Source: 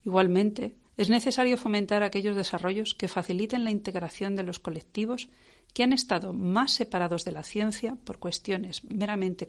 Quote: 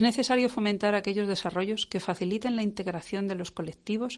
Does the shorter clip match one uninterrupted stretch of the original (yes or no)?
yes